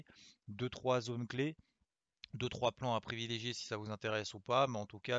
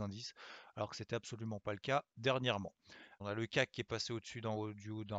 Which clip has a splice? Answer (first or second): second